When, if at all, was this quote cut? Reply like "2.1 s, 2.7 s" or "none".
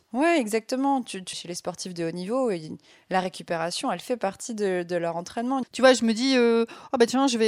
1.3 s, 5.6 s